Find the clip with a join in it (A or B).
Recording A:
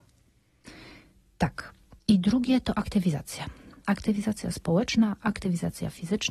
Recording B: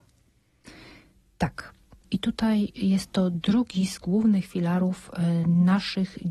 A